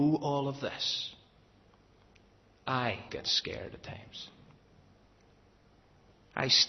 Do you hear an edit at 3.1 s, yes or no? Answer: yes